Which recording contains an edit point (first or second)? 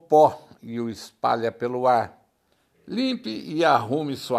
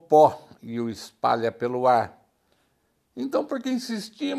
first